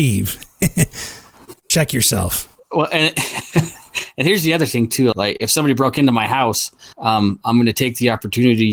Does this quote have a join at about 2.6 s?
no; 2 cuts; at 5.1 s, 6.9 s

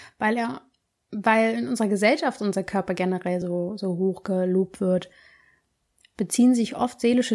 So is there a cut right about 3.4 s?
no; 0 cuts

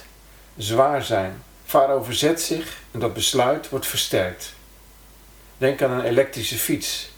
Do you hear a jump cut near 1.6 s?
yes; 1 cut; at 1.6 s

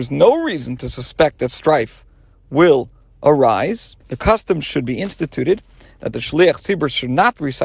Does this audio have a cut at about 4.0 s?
yes; 1 cut; at 4.0 s

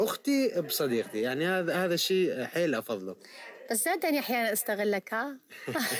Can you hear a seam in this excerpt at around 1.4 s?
no; 0 cuts

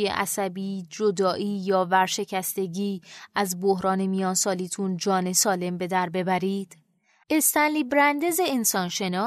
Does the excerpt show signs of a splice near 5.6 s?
no; 1 cut; at 7.2 s

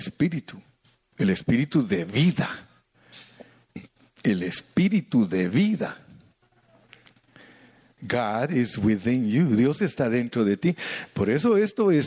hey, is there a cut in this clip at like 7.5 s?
no; 0 cuts

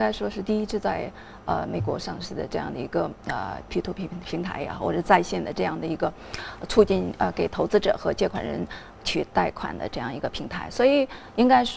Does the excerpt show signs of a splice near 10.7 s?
no; 0 cuts

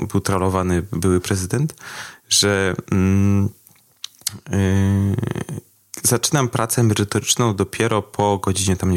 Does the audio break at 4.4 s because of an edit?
no; 0 cuts

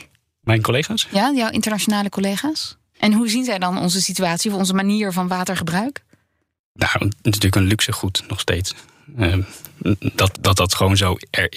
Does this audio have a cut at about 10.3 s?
yes; 2 cuts; at 2.9 s, 10.3 s

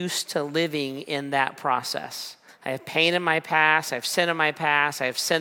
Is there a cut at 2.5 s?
yes; 1 cut; at 2.5 s

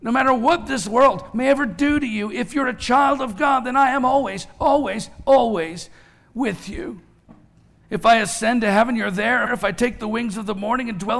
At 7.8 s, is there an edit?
yes; 2 cuts; at 7.8 s, 9.5 s

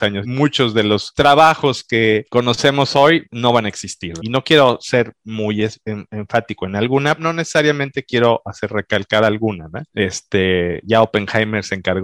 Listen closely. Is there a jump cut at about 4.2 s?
yes; 1 cut; at 4.2 s

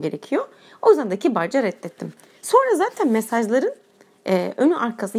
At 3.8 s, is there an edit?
no; 0 cuts

